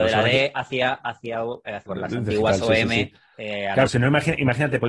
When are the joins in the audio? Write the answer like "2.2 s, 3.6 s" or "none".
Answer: 1.9 s, 3.9 s